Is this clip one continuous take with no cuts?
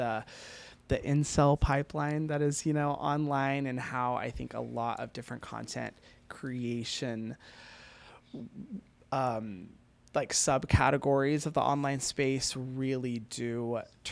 yes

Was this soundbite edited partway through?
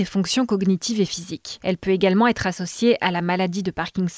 yes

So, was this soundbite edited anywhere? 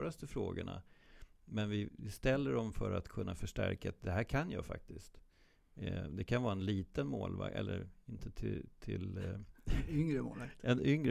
yes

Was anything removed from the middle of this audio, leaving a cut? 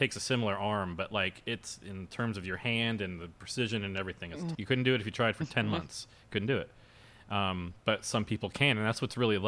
yes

